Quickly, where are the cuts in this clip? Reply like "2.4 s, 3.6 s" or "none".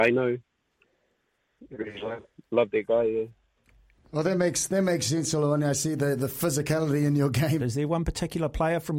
7.6 s